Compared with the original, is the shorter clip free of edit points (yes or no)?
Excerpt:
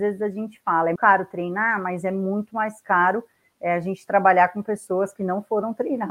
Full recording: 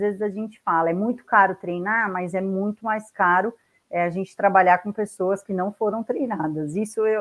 no